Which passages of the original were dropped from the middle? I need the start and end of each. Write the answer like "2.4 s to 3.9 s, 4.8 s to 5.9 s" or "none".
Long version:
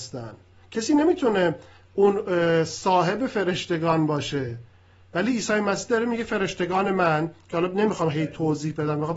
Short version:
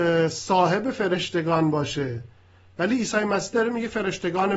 none